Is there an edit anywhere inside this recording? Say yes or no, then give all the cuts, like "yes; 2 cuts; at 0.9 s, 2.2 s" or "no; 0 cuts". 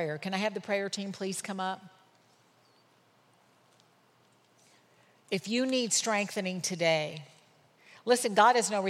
no; 0 cuts